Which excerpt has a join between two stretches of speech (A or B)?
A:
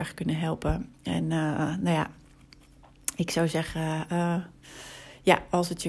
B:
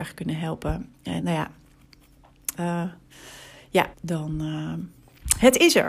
B